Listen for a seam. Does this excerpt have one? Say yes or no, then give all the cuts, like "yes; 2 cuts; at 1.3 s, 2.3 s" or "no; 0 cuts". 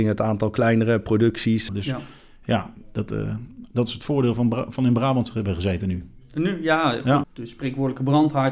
yes; 2 cuts; at 1.7 s, 7.2 s